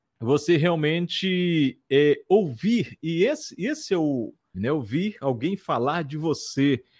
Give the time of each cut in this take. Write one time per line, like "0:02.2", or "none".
0:04.5